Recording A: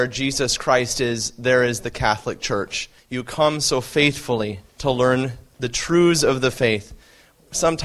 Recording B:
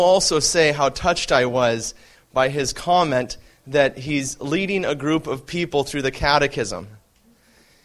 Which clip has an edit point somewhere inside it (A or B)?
A